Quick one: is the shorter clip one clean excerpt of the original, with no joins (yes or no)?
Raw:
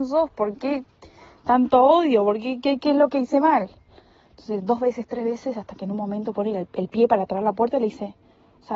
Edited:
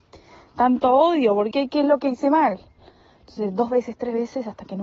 no